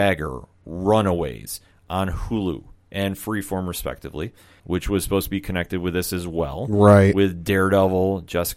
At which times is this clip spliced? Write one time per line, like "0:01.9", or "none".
0:04.6